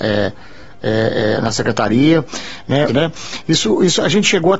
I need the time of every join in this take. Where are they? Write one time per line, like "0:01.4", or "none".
0:02.9

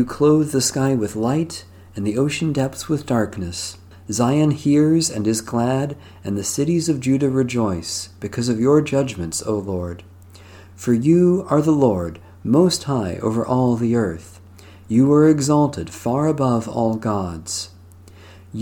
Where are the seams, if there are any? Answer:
0:03.9

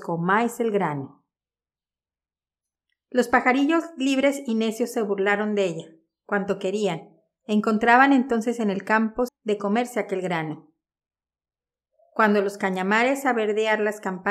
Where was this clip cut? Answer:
0:09.3

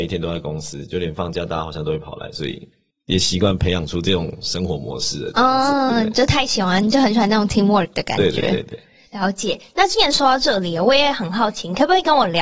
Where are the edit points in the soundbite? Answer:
0:05.9

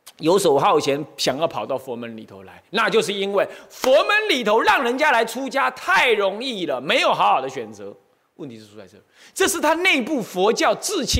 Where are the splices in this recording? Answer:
none

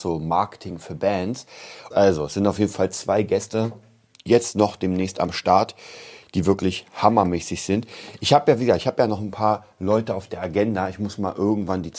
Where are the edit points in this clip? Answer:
0:01.9

